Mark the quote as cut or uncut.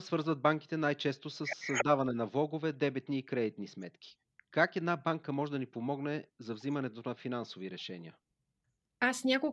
uncut